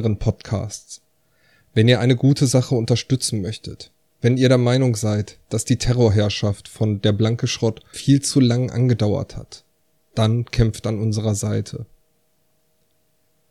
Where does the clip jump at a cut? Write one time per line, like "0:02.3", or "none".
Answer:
0:07.9